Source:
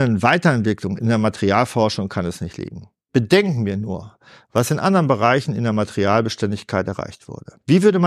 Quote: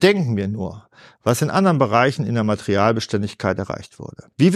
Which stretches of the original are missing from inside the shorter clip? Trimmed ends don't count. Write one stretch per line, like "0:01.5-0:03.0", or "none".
none